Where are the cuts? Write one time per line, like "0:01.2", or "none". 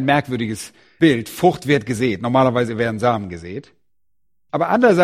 none